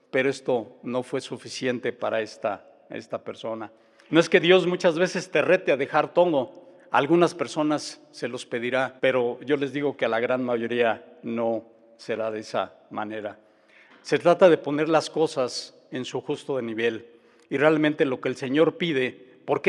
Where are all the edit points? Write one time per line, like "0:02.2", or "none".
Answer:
0:04.1
0:09.0
0:13.9